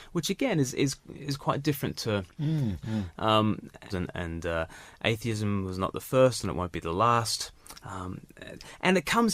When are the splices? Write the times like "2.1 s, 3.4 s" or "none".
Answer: 2.8 s, 3.9 s